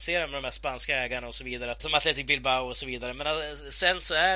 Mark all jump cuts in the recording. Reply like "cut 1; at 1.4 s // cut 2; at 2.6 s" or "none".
cut 1; at 1.8 s